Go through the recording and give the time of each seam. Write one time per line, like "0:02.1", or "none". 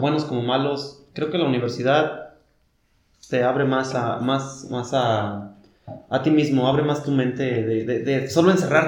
none